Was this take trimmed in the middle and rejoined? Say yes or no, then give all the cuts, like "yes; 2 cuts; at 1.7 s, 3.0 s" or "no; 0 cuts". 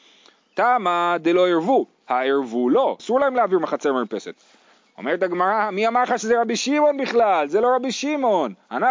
yes; 1 cut; at 3.0 s